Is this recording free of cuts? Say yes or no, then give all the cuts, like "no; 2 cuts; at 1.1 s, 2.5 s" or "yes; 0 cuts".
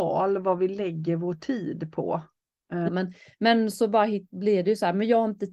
no; 1 cut; at 2.9 s